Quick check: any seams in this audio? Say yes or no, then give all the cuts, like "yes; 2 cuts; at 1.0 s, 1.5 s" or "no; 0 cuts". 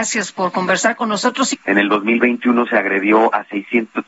yes; 1 cut; at 1.5 s